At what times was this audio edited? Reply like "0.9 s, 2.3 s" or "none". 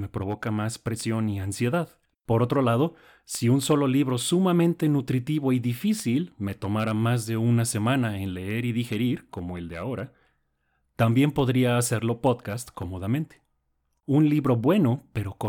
2.1 s, 14.0 s